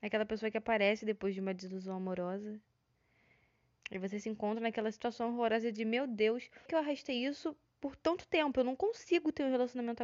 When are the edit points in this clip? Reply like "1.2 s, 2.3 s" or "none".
3.8 s, 6.7 s